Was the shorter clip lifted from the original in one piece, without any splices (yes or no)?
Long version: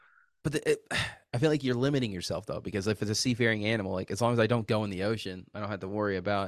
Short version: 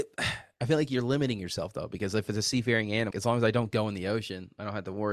no